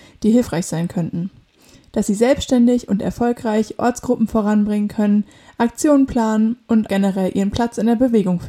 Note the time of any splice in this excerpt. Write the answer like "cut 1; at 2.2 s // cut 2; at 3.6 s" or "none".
cut 1; at 6.9 s